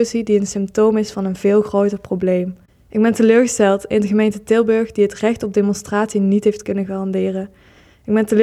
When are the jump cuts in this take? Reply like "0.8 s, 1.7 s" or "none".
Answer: none